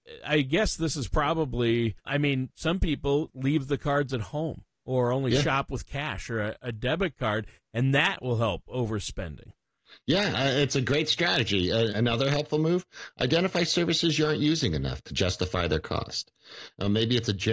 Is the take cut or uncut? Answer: cut